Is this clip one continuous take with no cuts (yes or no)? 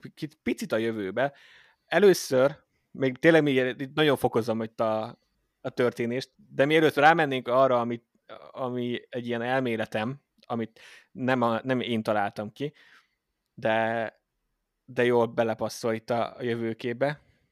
yes